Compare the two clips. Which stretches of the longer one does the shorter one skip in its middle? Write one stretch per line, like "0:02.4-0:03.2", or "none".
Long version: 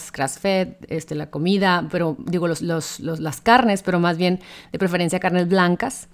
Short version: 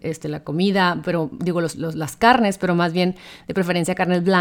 0:02.6-0:03.0